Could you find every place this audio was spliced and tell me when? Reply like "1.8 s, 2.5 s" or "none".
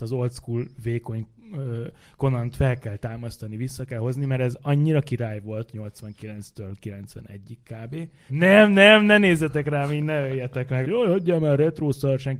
8.3 s, 10.8 s